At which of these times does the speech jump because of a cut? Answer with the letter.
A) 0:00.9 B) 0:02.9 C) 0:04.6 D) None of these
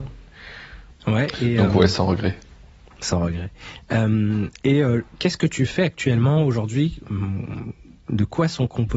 A